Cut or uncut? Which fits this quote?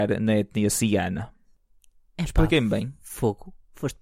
uncut